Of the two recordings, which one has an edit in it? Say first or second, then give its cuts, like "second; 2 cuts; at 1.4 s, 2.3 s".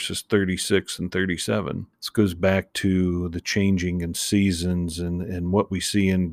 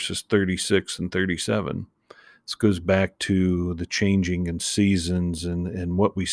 first; 1 cut; at 1.9 s